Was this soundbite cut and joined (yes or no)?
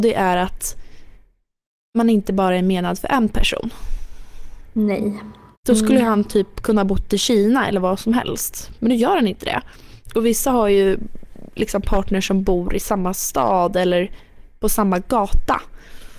yes